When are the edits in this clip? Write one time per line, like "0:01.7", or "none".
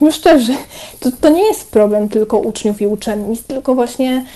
none